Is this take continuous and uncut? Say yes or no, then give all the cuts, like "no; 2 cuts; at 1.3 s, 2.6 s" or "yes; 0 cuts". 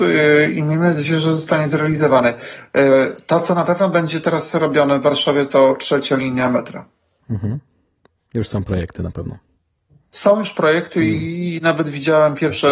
yes; 0 cuts